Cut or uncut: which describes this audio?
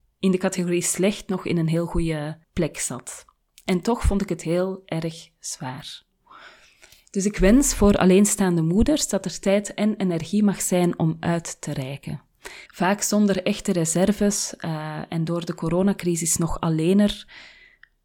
cut